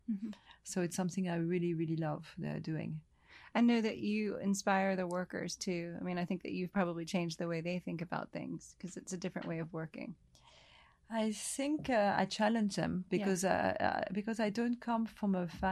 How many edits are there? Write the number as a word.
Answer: zero